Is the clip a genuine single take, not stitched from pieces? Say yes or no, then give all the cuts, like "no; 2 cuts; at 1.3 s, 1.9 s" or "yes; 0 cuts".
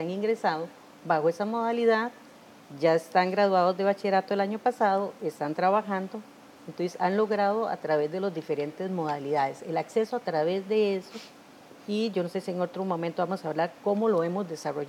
yes; 0 cuts